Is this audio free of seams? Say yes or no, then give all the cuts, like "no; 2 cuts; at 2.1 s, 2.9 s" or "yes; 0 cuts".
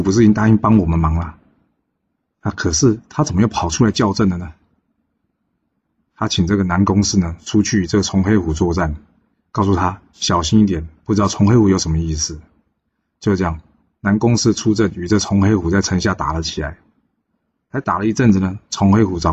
yes; 0 cuts